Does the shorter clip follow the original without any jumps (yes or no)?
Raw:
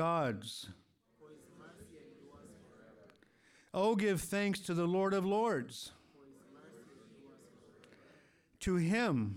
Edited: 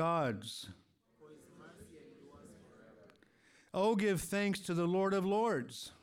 yes